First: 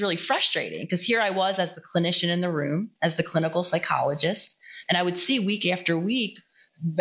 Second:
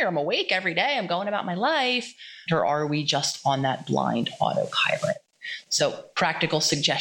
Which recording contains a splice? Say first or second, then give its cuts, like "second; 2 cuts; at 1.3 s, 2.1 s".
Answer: second; 1 cut; at 2.5 s